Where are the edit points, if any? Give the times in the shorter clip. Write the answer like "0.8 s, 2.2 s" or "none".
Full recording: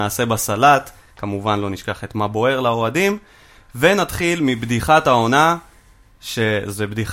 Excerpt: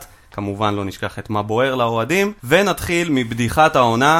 2.4 s

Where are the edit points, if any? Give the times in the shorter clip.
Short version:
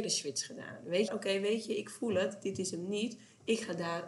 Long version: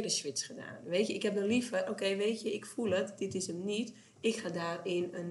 1.1 s

